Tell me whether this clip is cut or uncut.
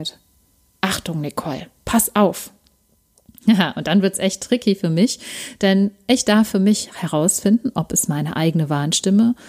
uncut